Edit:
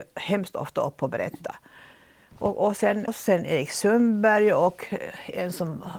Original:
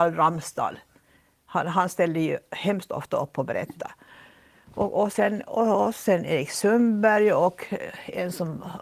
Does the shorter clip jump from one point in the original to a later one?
yes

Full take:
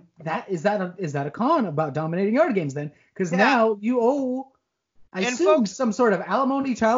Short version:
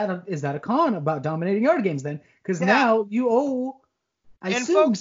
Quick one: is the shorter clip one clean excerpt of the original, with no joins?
yes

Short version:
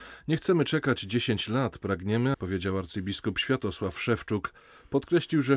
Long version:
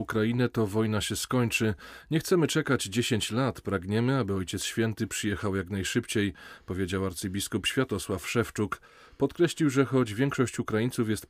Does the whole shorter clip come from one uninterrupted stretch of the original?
no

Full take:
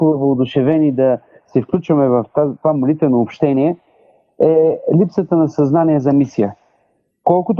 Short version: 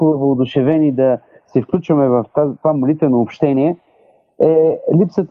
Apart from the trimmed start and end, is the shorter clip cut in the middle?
no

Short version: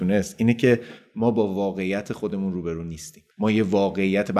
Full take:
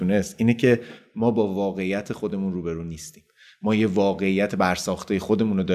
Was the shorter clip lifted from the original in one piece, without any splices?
no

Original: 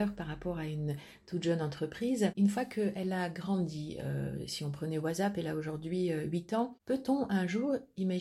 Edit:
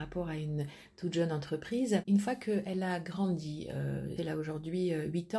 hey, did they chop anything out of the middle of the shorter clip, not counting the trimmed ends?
yes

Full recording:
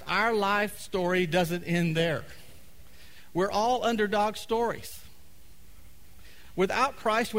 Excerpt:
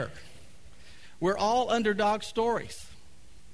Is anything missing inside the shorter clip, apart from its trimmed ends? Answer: no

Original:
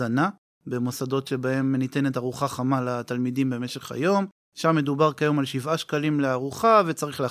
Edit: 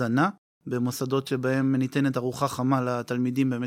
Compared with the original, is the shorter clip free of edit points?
yes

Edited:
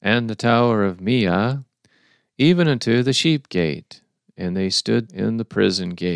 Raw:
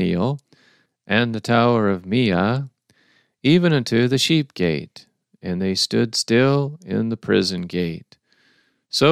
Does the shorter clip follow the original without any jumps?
no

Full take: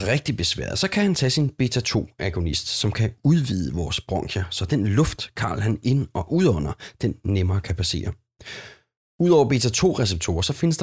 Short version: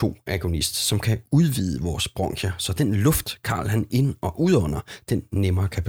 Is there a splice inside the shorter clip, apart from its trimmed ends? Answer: no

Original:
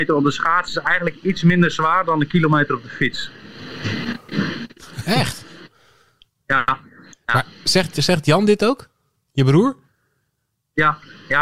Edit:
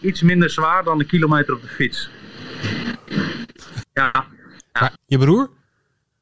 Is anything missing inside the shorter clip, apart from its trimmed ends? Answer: yes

